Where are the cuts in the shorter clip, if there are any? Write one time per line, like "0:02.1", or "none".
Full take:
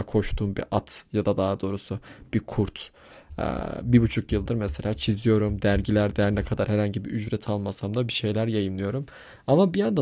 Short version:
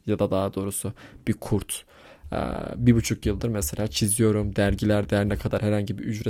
none